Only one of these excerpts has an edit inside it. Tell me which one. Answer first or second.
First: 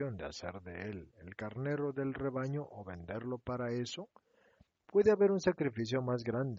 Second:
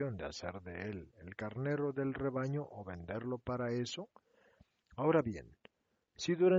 first